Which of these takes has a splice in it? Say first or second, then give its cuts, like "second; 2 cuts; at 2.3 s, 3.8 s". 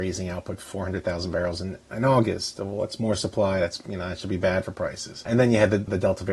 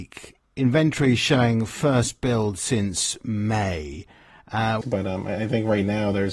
second; 1 cut; at 4.8 s